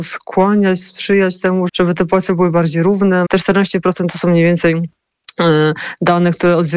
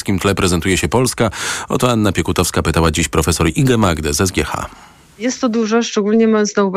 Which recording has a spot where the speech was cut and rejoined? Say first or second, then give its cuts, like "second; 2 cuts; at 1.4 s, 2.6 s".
first; 2 cuts; at 1.7 s, 3.3 s